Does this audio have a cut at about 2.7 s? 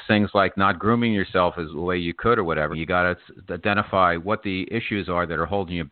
yes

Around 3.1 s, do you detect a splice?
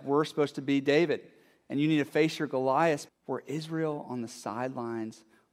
yes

